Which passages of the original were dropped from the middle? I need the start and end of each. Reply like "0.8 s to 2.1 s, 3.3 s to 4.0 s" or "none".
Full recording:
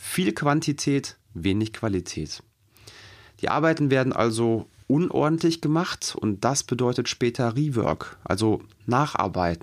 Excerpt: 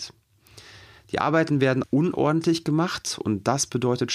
4.1 s to 4.8 s